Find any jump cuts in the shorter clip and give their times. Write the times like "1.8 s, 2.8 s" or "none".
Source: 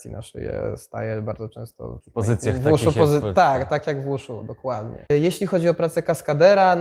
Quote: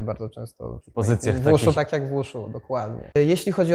1.7 s